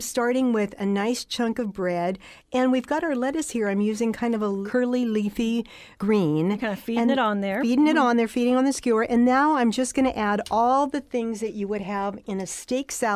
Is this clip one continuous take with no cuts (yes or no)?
yes